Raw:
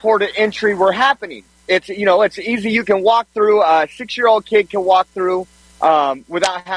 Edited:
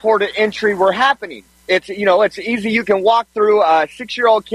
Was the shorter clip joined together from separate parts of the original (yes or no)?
no